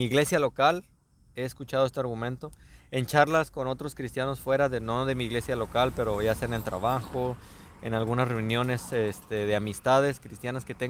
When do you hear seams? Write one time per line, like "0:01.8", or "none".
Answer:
none